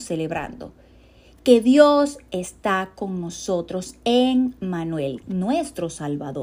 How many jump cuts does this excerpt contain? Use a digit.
1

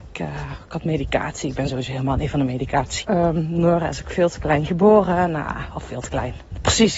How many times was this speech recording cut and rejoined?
1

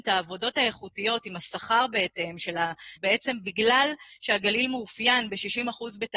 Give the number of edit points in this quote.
1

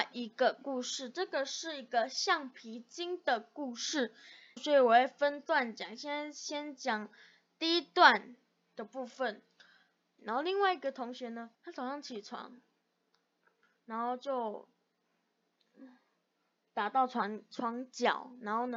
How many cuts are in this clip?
3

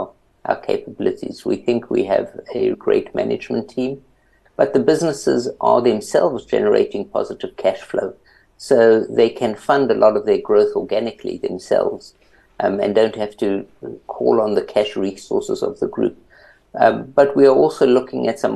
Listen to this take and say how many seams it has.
2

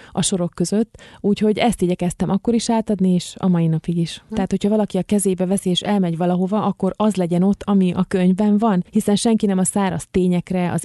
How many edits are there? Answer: 2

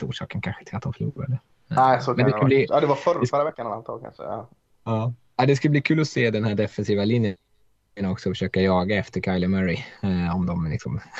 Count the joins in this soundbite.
0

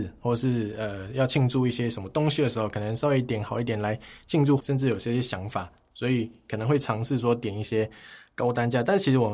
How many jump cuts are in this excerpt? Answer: 1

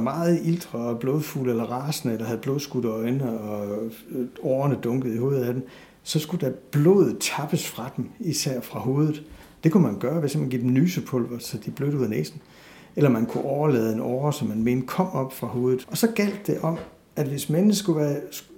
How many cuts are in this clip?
2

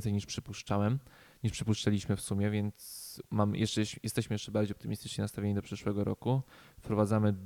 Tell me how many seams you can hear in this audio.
0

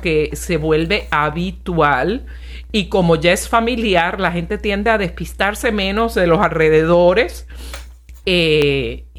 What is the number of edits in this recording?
1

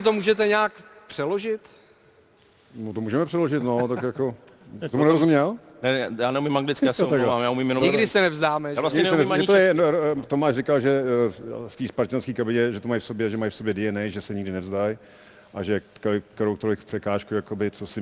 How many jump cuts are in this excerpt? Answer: 0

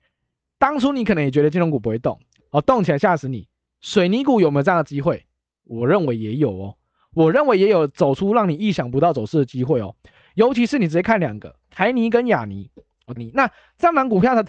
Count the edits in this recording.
2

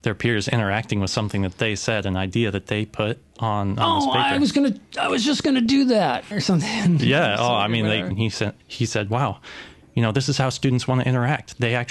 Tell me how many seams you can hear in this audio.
2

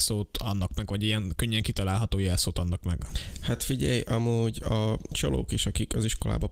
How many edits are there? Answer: 0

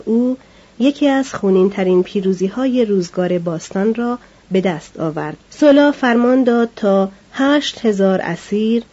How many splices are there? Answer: 1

